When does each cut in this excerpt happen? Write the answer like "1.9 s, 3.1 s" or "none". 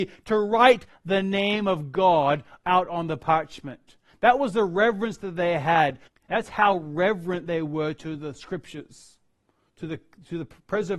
6.1 s